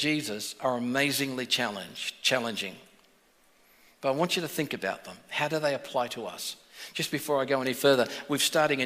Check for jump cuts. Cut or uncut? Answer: uncut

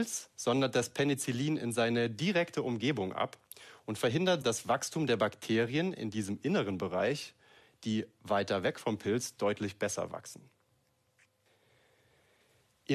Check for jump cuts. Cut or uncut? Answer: cut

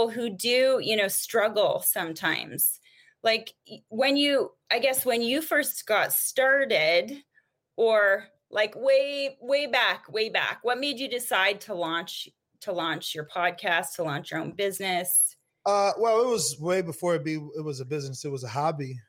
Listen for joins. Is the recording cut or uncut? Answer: uncut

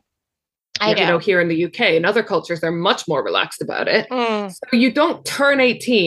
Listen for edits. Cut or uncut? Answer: cut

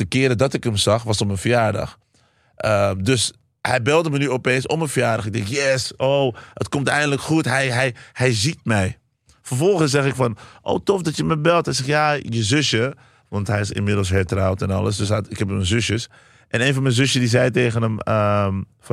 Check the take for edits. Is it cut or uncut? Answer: uncut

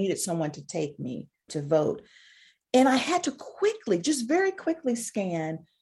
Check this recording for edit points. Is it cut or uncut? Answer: cut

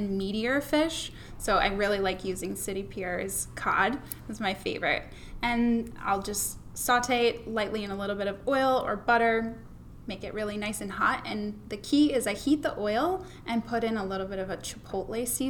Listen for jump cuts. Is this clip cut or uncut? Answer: uncut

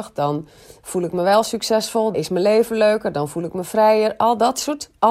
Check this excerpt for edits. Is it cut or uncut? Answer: cut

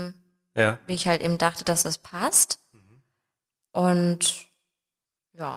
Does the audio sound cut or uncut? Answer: uncut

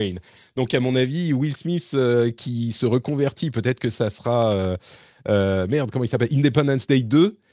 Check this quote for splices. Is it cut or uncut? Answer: uncut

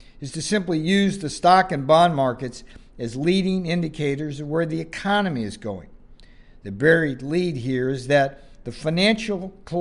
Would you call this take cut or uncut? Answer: uncut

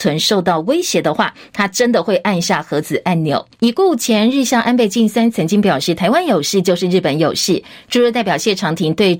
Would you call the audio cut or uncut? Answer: cut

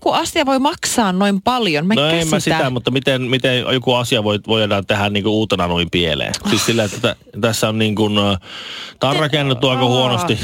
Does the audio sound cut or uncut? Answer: uncut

